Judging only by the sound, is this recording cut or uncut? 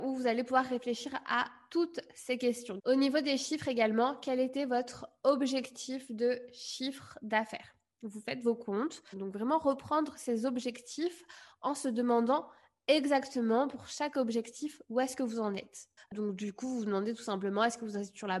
cut